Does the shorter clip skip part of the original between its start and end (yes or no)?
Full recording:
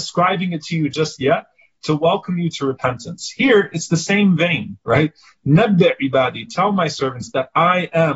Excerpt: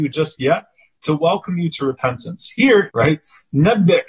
yes